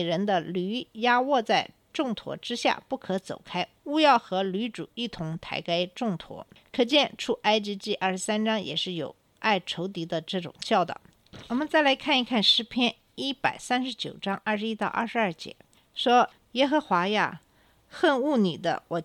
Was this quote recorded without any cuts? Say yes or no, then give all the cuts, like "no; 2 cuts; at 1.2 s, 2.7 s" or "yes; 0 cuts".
yes; 0 cuts